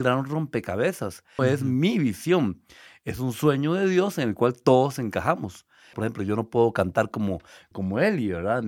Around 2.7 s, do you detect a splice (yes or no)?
no